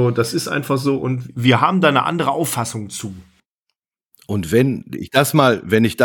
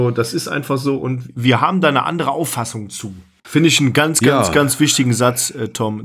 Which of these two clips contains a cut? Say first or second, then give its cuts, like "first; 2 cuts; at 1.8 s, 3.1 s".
second; 1 cut; at 3.4 s